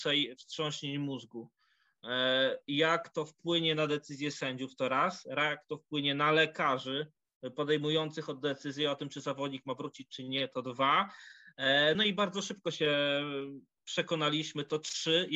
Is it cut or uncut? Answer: uncut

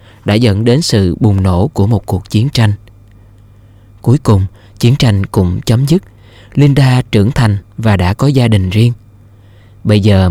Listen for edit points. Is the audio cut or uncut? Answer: uncut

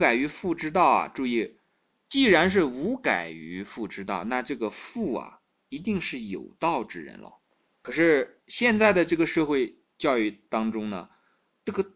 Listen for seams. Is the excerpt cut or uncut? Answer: uncut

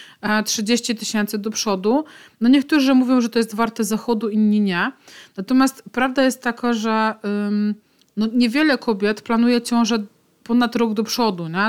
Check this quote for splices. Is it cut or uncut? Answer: uncut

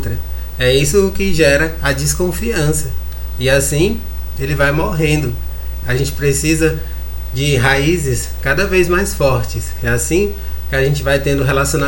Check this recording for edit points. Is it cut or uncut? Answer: cut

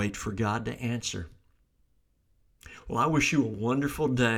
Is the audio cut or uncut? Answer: uncut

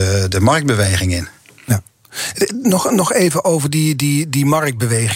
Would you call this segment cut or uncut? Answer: uncut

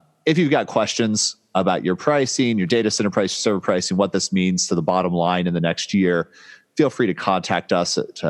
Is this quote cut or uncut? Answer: uncut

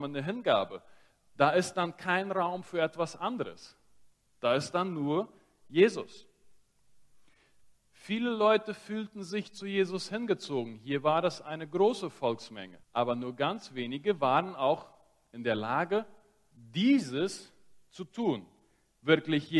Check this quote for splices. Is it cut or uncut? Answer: cut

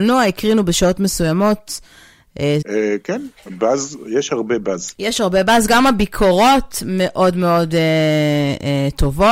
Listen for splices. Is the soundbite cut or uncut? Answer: cut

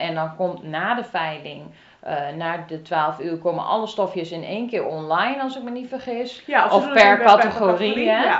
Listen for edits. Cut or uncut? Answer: uncut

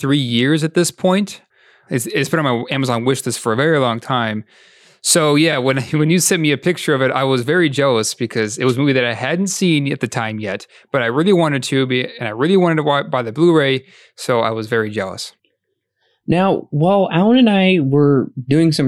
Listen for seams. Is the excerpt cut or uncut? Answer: uncut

